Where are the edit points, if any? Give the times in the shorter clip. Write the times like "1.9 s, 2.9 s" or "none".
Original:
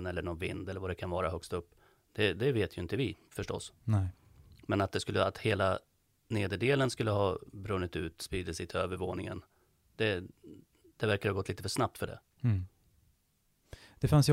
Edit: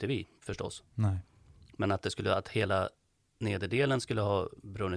none